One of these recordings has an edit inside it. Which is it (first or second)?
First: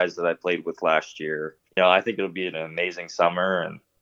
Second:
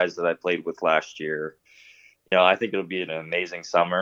first